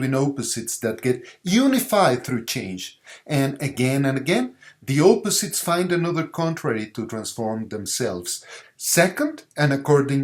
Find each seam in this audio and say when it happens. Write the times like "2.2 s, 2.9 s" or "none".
8.6 s